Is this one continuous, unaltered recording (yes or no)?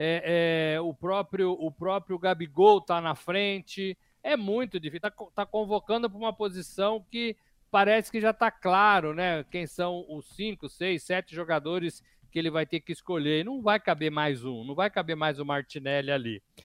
yes